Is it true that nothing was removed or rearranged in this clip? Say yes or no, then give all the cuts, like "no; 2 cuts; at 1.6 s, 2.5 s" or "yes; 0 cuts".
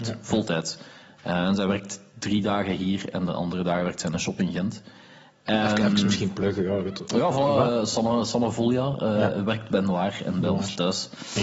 yes; 0 cuts